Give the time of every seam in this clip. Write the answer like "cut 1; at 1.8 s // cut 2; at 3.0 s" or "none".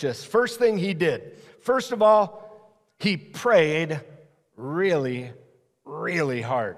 none

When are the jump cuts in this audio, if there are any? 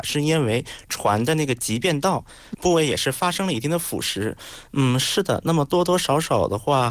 cut 1; at 2.5 s // cut 2; at 4.7 s

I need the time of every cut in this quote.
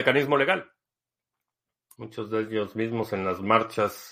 cut 1; at 2.0 s

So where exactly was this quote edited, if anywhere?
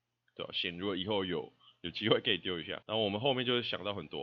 cut 1; at 2.8 s

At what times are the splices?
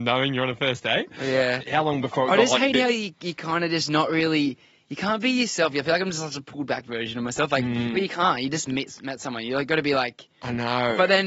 none

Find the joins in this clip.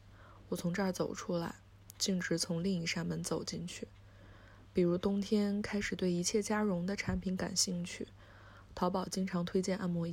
cut 1; at 4.7 s

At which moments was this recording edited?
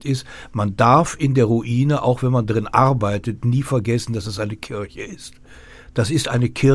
none

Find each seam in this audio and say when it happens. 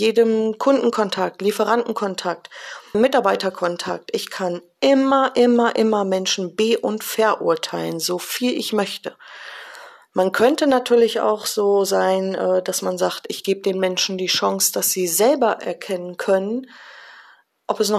cut 1; at 2.9 s

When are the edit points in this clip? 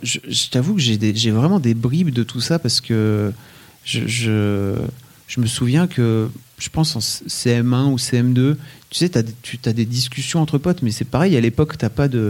none

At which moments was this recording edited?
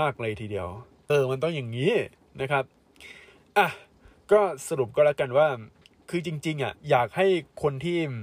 cut 1; at 1.1 s // cut 2; at 6.8 s

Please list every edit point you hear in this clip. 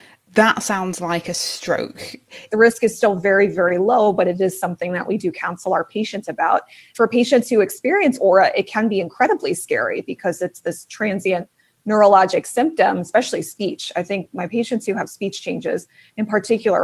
cut 1; at 2.5 s

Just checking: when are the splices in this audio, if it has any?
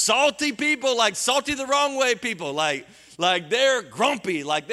none

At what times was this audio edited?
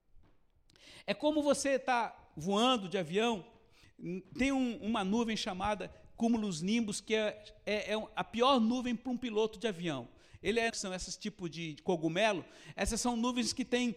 cut 1; at 10.7 s

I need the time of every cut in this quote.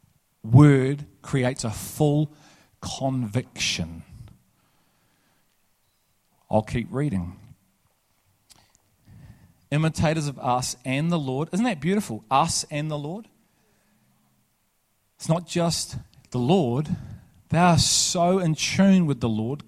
none

